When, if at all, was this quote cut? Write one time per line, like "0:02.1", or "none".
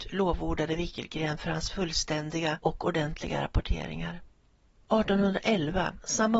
0:04.7